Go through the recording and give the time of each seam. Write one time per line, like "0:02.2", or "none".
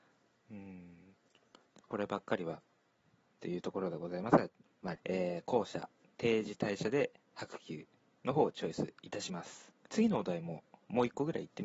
0:05.0
0:09.9